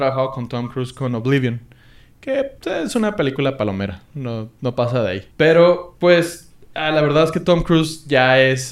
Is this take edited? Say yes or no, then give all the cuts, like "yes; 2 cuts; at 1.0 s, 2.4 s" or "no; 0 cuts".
yes; 1 cut; at 5.3 s